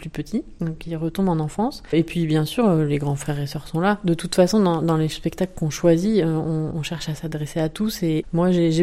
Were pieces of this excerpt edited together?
no; 0 cuts

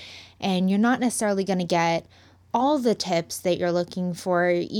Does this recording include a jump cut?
no; 0 cuts

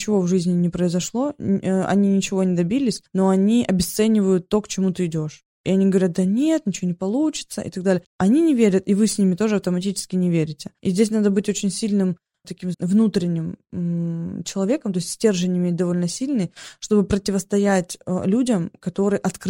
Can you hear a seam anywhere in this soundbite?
yes; 2 cuts; at 8.1 s, 12.7 s

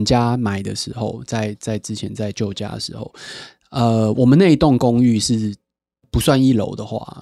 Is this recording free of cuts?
yes; 0 cuts

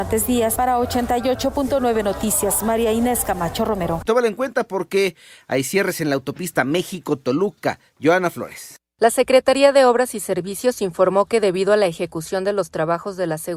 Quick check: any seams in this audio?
no; 0 cuts

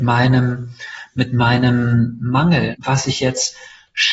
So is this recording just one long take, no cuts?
no; 1 cut; at 2.7 s

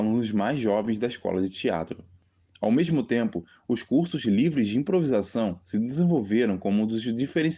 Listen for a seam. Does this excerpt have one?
no; 0 cuts

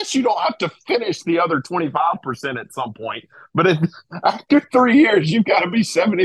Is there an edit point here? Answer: no; 0 cuts

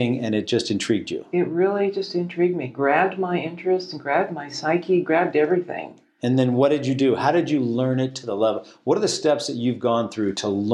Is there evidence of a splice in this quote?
no; 0 cuts

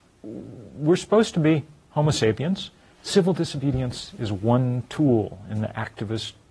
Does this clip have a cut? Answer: yes; 1 cut; at 2.9 s

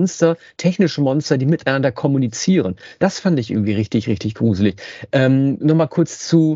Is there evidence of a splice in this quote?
no; 0 cuts

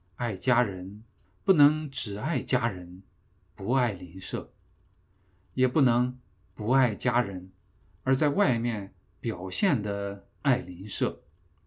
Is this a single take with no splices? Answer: no; 1 cut; at 1.2 s

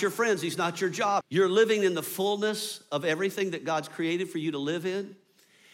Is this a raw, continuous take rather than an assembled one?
no; 1 cut; at 1.2 s

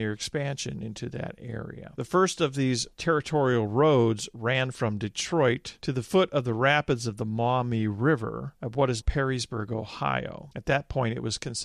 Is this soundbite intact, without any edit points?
no; 1 cut; at 9.0 s

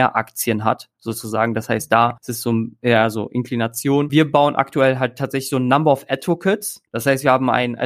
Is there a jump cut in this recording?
no; 0 cuts

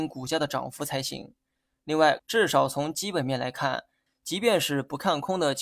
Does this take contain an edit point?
yes; 2 cuts; at 2.2 s, 4.1 s

